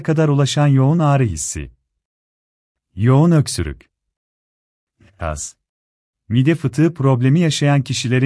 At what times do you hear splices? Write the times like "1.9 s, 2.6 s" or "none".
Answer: 6.1 s